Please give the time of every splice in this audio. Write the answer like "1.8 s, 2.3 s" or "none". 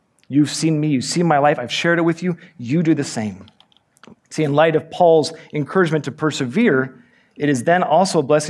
4.1 s